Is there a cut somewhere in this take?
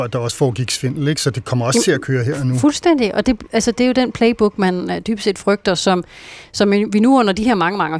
no; 0 cuts

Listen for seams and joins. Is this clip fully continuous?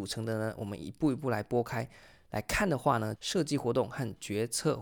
no; 1 cut; at 3.2 s

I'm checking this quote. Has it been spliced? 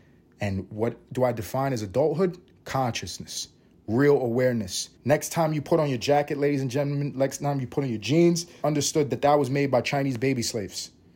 yes; 2 cuts; at 5.0 s, 8.6 s

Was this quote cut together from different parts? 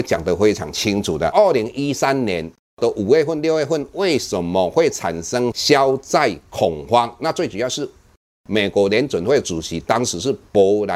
no; 0 cuts

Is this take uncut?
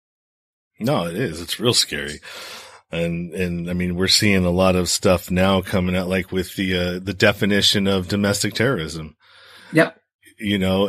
yes; 0 cuts

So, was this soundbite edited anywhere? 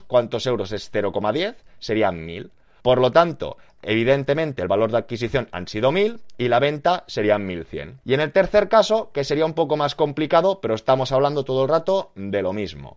yes; 2 cuts; at 2.8 s, 8.0 s

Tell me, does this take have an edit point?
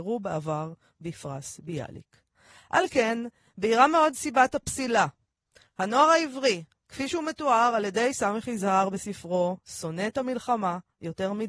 no; 0 cuts

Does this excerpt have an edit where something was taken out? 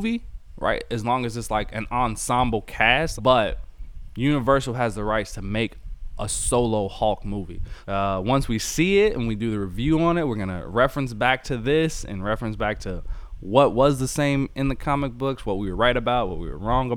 yes; 2 cuts; at 3.2 s, 7.8 s

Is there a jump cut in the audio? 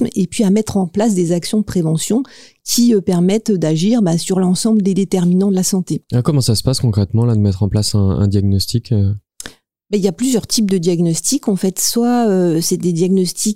no; 0 cuts

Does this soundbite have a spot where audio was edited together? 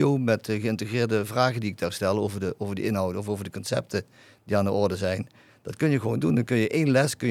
no; 0 cuts

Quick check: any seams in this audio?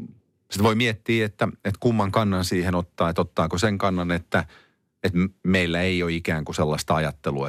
no; 0 cuts

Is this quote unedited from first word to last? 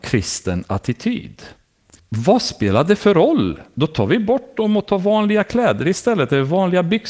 no; 1 cut; at 2.0 s

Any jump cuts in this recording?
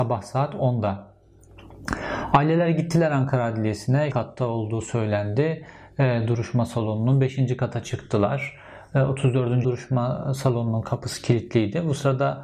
yes; 2 cuts; at 4.1 s, 9.6 s

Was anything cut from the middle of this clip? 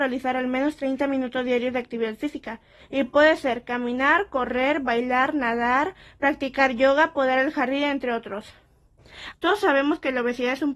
yes; 2 cuts; at 2.8 s, 9.3 s

